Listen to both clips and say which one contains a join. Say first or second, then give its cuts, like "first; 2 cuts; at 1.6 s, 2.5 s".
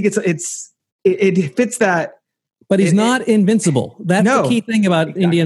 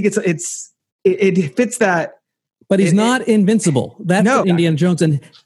second; 1 cut; at 4.4 s